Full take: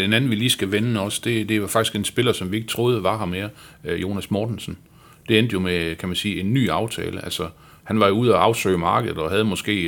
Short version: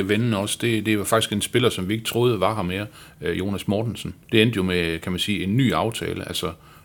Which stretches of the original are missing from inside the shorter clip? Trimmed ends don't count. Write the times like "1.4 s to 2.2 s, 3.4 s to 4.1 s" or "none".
4.9 s to 5.2 s